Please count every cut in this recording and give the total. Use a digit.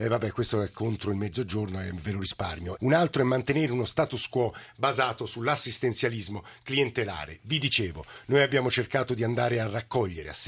1